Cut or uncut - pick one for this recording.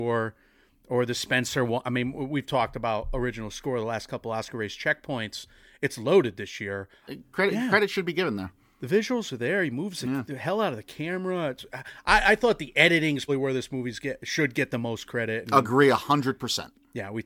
cut